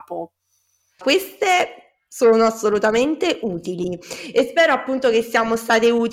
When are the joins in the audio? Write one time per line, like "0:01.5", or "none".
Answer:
0:01.0